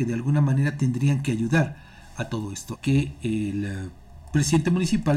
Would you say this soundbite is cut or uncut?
cut